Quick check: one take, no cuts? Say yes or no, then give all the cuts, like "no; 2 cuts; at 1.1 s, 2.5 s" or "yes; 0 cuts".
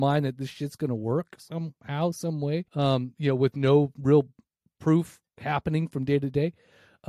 no; 2 cuts; at 2.7 s, 5.3 s